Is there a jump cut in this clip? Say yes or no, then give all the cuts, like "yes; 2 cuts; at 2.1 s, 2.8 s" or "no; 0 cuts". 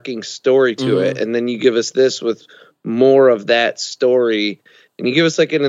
no; 0 cuts